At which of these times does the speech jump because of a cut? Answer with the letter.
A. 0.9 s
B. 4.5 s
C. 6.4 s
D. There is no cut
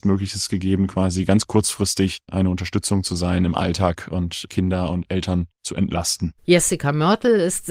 B